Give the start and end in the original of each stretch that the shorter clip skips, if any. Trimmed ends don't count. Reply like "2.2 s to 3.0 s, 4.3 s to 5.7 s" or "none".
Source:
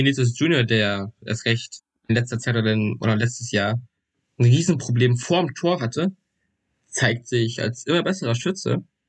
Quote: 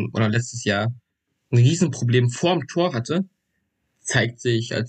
none